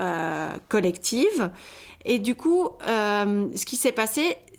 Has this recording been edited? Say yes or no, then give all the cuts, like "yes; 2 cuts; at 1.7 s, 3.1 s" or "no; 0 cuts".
no; 0 cuts